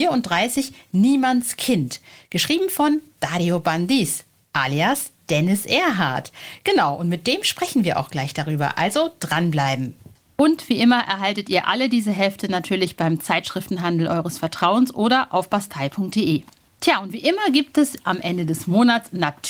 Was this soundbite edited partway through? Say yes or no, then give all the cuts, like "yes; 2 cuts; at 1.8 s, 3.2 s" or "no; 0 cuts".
no; 0 cuts